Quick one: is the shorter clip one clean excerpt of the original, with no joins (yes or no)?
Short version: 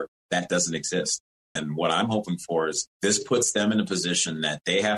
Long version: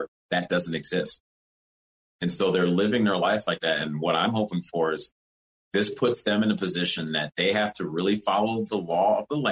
no